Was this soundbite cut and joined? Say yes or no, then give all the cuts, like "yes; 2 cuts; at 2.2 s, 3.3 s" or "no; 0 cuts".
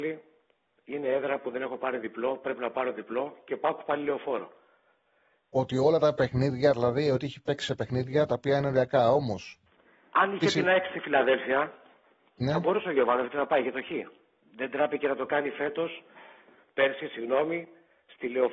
yes; 1 cut; at 5.4 s